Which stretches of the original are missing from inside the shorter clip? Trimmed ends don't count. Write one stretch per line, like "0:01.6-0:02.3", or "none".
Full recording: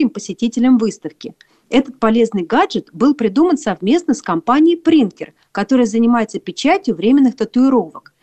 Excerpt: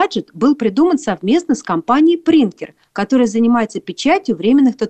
none